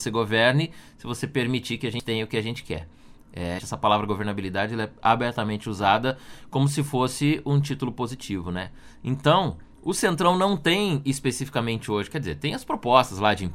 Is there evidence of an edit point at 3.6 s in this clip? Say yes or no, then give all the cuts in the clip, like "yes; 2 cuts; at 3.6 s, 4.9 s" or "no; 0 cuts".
yes; 1 cut; at 3.6 s